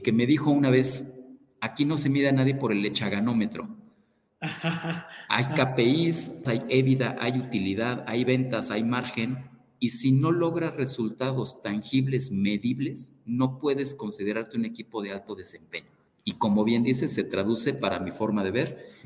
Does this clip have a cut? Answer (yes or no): yes